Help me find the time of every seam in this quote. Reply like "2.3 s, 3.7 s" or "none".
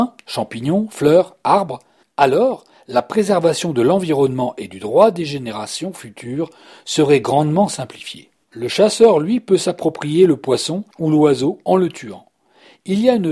8.4 s, 10.9 s